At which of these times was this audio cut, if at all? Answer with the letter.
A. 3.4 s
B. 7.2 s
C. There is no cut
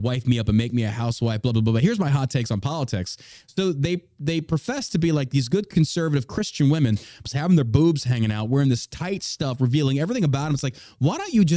B